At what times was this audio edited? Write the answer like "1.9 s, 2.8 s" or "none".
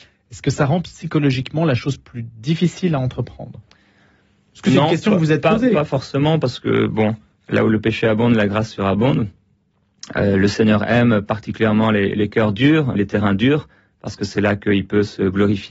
13.0 s